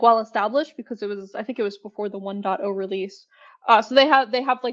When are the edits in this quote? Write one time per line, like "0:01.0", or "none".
none